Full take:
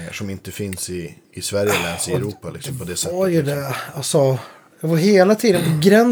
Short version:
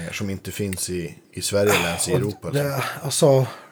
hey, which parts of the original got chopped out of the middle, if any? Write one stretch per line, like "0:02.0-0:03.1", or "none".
0:02.5-0:03.4

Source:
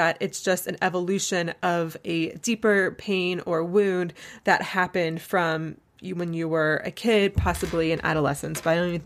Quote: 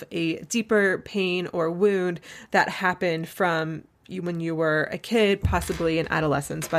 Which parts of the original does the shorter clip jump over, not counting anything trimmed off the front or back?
none

